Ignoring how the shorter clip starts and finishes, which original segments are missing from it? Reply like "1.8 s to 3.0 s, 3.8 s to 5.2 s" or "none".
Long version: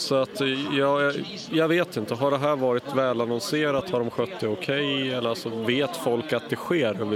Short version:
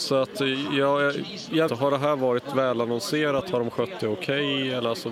1.7 s to 2.1 s